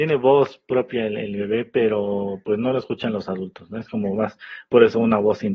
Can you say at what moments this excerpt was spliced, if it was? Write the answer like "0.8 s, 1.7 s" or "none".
none